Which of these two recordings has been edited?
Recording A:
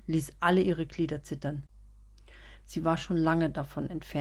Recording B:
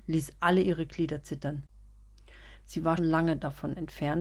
B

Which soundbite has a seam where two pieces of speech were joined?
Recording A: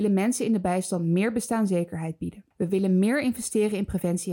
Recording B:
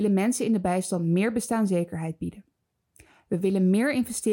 A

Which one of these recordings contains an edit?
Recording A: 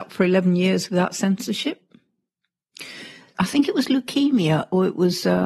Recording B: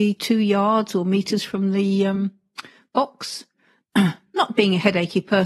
A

